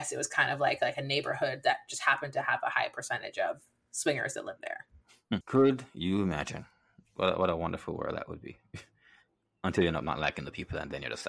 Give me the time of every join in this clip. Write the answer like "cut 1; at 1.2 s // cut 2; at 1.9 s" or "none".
cut 1; at 5.4 s